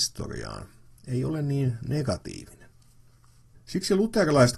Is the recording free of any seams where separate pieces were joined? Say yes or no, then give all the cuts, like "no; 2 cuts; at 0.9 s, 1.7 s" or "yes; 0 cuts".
no; 1 cut; at 3.5 s